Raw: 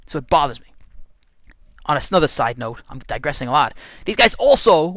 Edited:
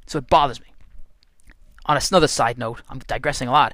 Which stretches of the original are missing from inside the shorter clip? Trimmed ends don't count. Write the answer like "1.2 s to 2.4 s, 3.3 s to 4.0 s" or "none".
none